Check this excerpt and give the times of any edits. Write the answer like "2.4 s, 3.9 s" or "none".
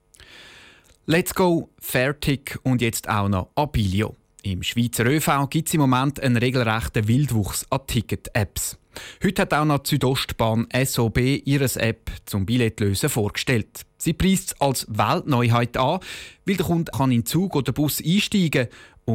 16.9 s